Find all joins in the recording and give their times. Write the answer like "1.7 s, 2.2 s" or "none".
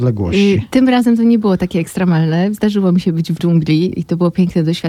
3.4 s